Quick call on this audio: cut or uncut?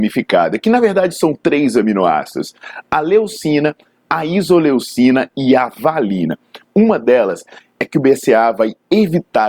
cut